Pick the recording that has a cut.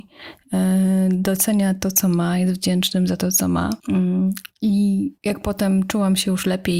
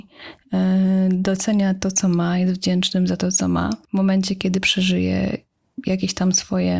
first; 2 cuts; at 3.8 s, 5.2 s

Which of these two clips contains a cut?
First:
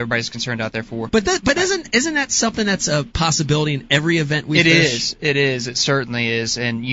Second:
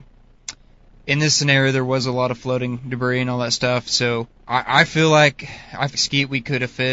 second; 2 cuts; at 4.3 s, 5.9 s

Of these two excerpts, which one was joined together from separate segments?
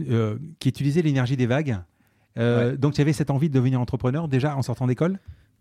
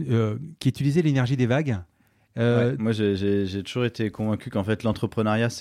second; 1 cut; at 2.8 s

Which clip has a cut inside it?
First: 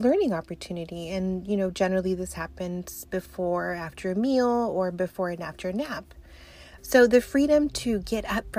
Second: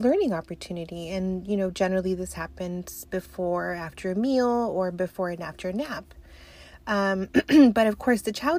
first; 1 cut; at 6.8 s

